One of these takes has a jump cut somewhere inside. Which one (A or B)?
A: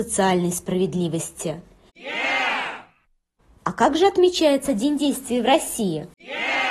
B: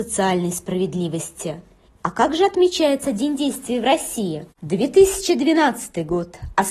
B